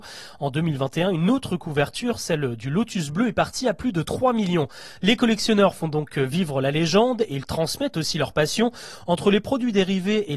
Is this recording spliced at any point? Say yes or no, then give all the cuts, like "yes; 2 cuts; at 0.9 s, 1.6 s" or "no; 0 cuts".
no; 0 cuts